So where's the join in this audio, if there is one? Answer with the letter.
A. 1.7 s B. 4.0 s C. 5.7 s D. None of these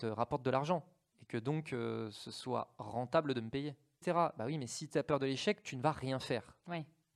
B